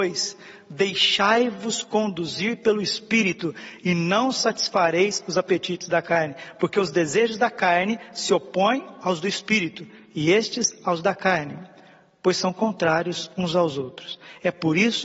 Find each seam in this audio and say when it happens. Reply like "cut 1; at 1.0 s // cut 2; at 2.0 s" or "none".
none